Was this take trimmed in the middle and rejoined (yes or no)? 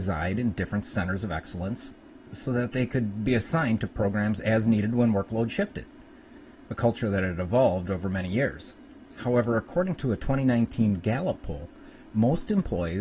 no